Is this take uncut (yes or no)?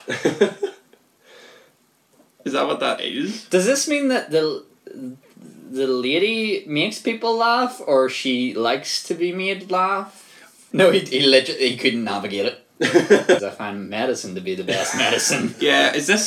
no